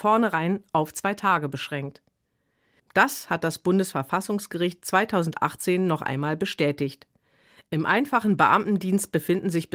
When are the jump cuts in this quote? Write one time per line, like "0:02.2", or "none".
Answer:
0:02.8